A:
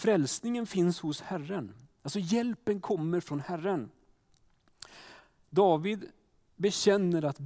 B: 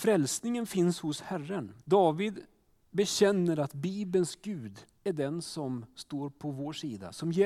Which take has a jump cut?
B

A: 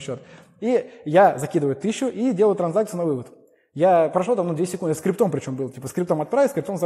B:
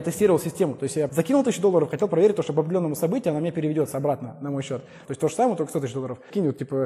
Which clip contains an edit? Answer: B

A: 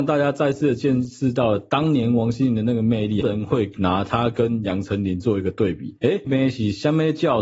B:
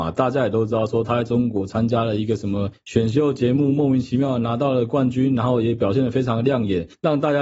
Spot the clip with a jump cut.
A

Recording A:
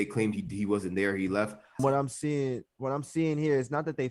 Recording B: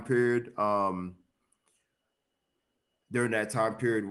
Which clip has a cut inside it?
A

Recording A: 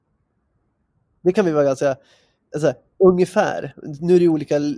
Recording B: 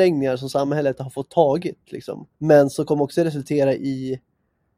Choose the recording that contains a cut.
B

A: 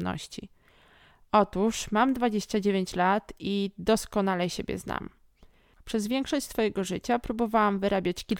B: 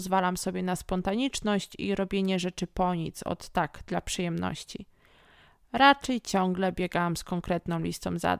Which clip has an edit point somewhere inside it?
A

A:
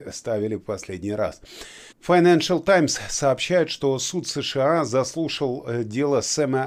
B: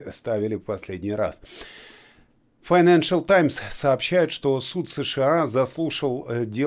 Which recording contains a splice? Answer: A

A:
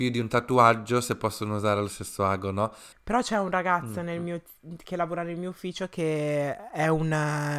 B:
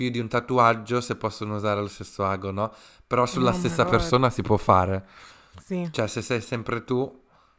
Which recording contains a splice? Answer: A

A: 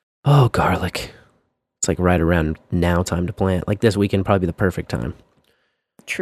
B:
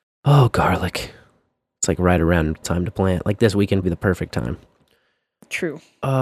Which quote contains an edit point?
B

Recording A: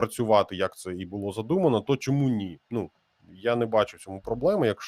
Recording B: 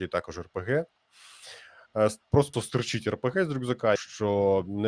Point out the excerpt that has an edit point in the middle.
B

